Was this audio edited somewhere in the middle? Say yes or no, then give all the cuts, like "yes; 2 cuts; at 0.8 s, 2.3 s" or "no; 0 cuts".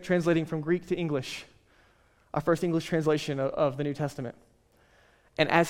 yes; 1 cut; at 3.5 s